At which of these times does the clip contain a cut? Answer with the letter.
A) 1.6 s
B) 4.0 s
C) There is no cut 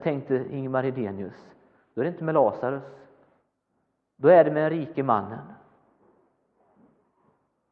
C